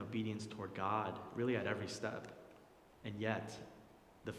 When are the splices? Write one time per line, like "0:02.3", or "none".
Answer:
0:02.8

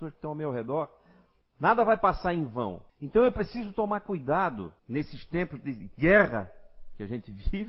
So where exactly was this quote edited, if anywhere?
0:01.4
0:02.9
0:04.8

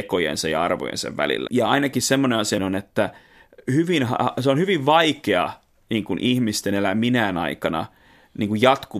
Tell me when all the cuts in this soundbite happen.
0:01.5
0:02.6

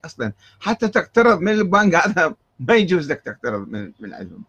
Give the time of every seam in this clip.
0:01.4

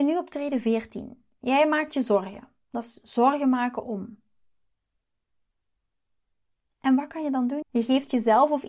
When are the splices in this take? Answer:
0:07.6

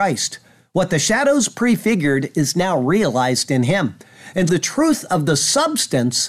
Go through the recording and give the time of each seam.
0:04.5

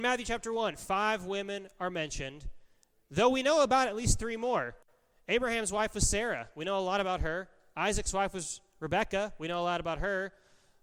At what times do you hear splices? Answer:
none

